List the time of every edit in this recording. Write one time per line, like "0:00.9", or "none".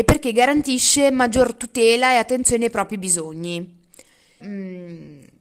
0:04.4